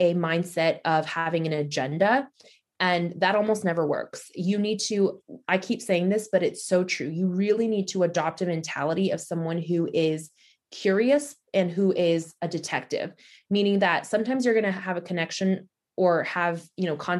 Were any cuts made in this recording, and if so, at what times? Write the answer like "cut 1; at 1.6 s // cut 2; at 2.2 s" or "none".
none